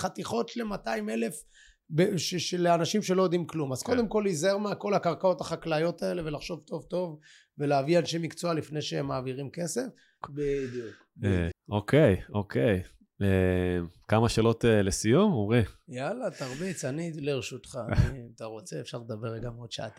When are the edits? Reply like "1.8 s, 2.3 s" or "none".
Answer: 10.2 s, 11.5 s